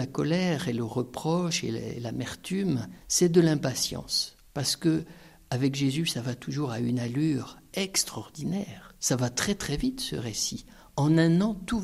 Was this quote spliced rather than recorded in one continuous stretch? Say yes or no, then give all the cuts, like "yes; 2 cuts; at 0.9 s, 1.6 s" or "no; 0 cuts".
no; 0 cuts